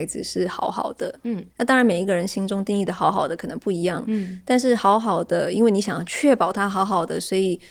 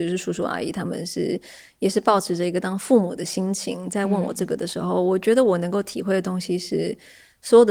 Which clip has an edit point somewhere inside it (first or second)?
first